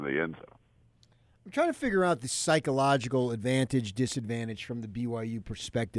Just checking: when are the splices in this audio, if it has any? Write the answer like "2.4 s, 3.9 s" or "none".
none